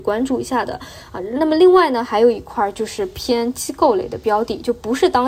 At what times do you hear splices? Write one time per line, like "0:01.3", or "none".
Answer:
none